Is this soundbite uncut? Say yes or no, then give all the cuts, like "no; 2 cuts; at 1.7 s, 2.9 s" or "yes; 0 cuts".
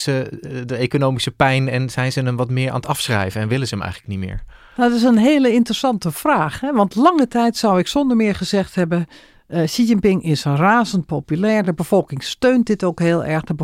yes; 0 cuts